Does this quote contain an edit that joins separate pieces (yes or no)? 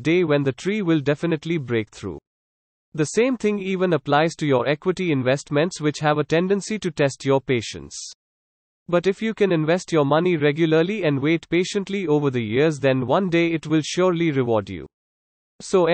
no